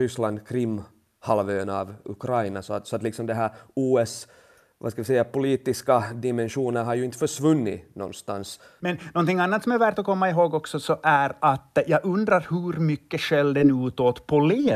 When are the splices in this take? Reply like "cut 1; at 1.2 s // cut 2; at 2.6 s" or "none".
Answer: none